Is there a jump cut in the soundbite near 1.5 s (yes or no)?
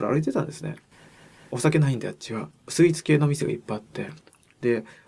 no